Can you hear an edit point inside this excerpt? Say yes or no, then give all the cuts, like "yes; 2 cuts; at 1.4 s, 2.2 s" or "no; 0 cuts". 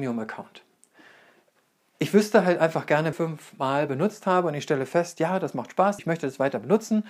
yes; 2 cuts; at 3.1 s, 6.0 s